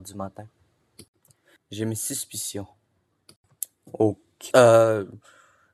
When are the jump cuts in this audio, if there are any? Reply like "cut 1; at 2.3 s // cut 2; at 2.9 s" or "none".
cut 1; at 1.6 s // cut 2; at 4.5 s